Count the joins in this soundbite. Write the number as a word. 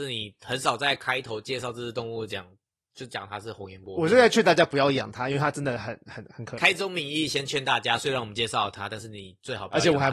zero